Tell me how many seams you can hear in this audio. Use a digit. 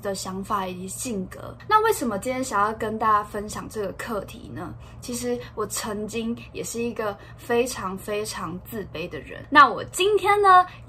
0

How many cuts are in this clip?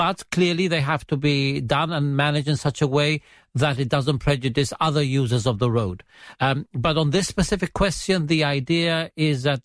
0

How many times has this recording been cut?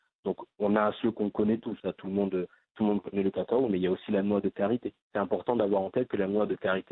2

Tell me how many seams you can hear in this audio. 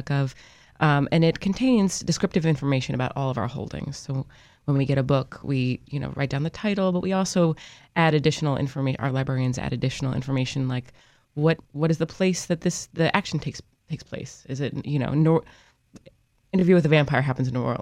0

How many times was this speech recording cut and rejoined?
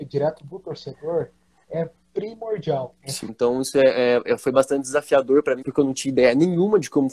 2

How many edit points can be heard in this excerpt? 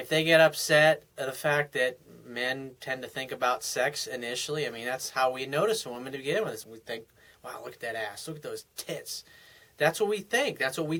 1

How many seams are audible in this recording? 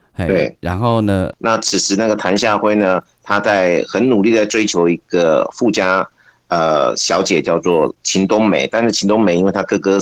1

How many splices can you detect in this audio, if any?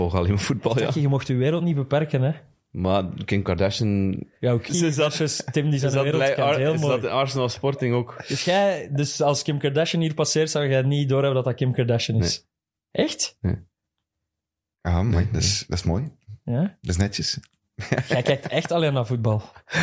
1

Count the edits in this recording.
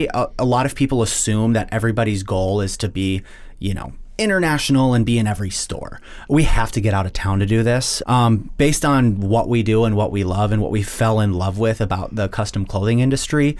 2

